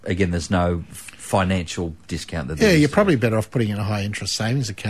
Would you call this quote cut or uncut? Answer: uncut